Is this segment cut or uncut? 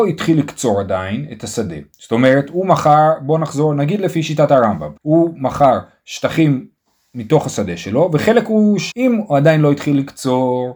cut